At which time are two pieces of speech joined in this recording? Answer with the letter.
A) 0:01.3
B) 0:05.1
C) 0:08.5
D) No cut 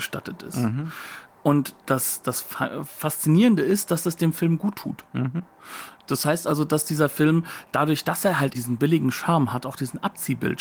C